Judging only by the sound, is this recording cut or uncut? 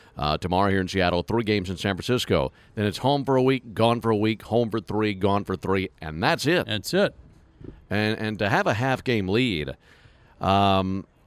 uncut